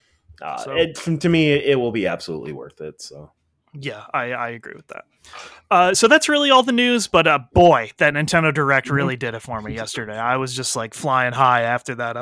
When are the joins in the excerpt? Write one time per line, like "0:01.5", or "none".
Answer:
none